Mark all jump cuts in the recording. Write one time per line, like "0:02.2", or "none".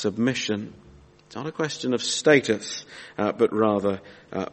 none